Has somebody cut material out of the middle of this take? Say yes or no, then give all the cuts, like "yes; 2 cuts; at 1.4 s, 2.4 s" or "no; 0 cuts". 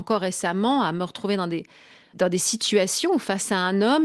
no; 0 cuts